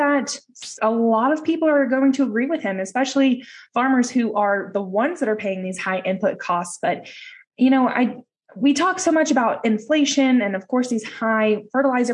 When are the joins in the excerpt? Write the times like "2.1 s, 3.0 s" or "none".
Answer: none